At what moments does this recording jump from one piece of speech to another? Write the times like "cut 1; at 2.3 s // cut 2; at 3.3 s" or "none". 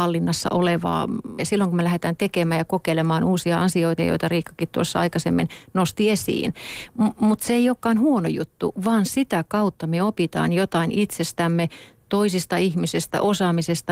cut 1; at 1.4 s // cut 2; at 4.0 s